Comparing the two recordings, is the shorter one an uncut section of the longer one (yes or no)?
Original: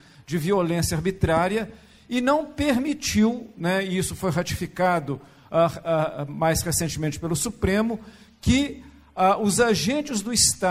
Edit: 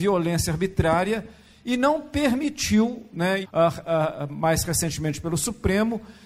no